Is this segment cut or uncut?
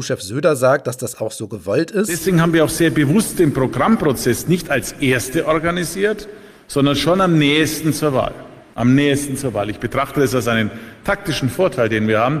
uncut